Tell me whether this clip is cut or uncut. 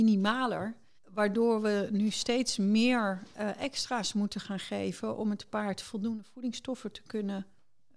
cut